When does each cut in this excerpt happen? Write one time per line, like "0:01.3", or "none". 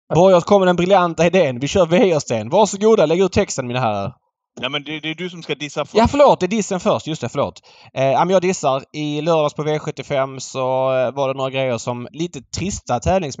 0:12.1